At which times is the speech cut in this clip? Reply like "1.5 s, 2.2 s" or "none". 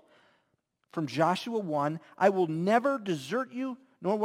none